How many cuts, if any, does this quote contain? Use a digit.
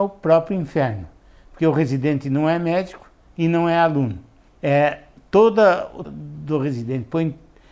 2